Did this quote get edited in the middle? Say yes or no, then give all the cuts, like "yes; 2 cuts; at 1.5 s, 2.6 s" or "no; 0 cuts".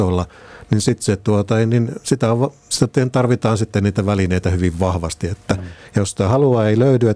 no; 0 cuts